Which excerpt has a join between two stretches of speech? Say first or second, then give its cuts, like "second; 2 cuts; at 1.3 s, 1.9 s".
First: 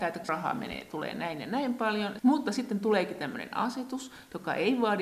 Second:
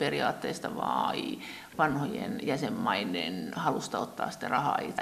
first; 1 cut; at 2.2 s